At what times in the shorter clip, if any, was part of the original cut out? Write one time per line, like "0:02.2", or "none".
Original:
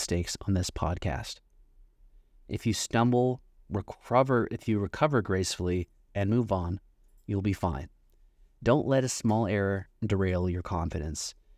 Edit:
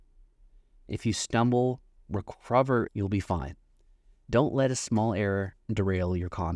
0:02.9